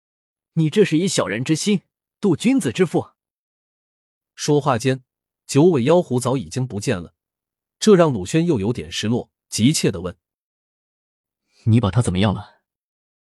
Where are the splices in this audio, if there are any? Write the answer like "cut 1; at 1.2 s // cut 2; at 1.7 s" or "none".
none